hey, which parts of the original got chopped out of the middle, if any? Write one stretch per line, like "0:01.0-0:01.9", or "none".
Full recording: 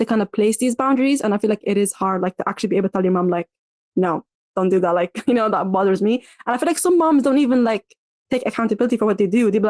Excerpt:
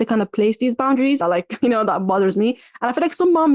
0:01.2-0:04.9